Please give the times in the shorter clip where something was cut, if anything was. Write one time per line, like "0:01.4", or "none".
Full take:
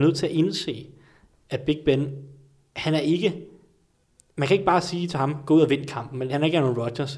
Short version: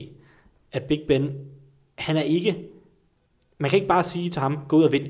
none